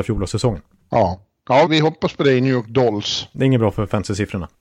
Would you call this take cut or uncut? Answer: cut